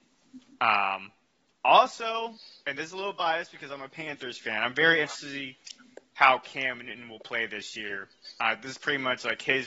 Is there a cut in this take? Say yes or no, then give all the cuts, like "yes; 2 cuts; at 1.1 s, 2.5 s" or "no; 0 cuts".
no; 0 cuts